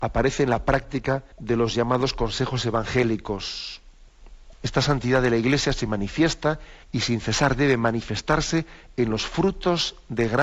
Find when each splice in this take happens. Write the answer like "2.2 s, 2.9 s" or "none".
1.3 s, 4.5 s, 6.8 s